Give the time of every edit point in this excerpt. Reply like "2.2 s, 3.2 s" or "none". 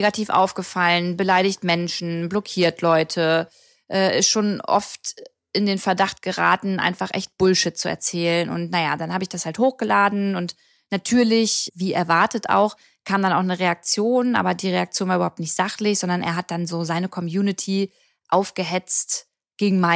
11.7 s